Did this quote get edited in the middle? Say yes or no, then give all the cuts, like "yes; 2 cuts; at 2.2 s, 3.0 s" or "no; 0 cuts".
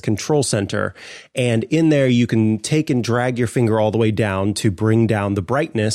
no; 0 cuts